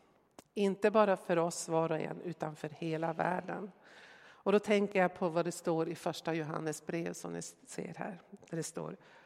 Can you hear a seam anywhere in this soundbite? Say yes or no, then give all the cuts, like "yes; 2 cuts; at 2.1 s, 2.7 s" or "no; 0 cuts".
no; 0 cuts